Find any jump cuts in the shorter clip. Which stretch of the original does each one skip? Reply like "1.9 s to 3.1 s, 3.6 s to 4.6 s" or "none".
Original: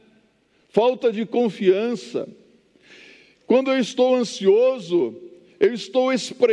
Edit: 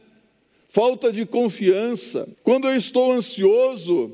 2.3 s to 3.4 s